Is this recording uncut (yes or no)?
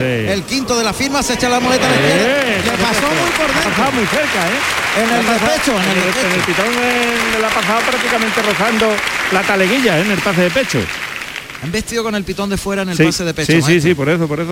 yes